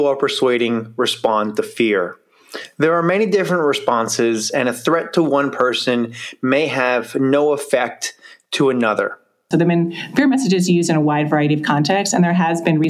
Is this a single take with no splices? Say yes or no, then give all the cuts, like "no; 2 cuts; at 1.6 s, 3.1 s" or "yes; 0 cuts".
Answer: no; 1 cut; at 9.5 s